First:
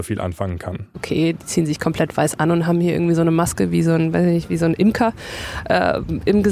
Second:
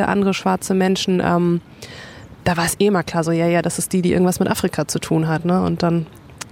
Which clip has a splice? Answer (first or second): first